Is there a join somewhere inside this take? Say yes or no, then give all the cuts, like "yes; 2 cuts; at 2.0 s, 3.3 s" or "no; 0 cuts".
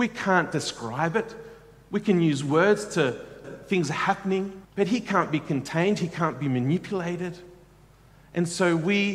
yes; 2 cuts; at 3.4 s, 4.6 s